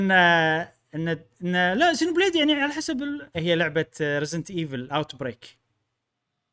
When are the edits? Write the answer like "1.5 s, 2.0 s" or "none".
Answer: 3.3 s